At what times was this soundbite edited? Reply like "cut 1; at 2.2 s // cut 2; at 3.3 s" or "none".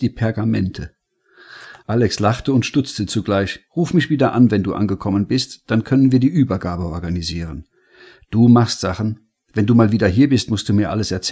cut 1; at 3.7 s

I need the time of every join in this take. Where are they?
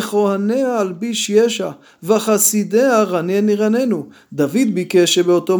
none

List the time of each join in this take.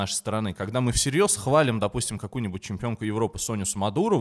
none

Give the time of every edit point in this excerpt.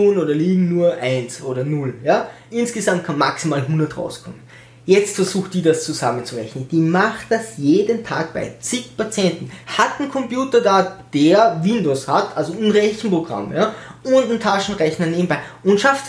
cut 1; at 9.6 s

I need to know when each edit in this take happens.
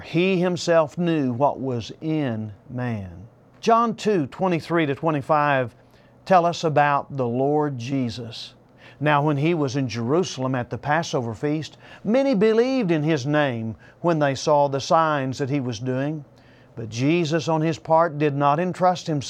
cut 1; at 3.5 s

